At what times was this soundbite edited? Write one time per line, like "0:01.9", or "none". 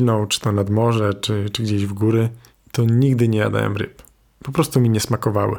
none